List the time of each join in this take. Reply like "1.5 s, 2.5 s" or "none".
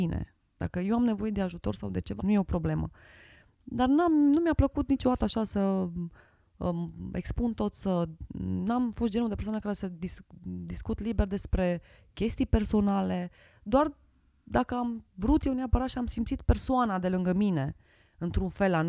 2.2 s